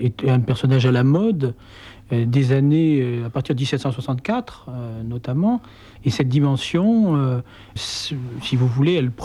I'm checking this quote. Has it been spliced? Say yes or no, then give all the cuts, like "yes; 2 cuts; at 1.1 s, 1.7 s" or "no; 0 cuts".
yes; 2 cuts; at 6.0 s, 7.8 s